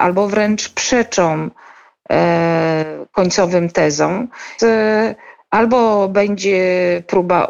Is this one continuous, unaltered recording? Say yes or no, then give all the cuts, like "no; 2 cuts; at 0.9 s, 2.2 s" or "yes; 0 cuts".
no; 1 cut; at 4.6 s